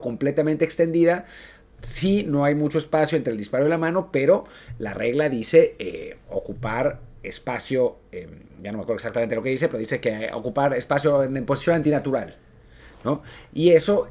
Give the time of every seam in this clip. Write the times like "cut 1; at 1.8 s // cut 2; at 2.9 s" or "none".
none